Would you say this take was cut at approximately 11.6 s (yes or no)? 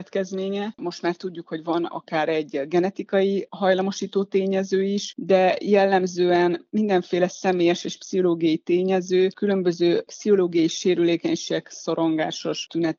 yes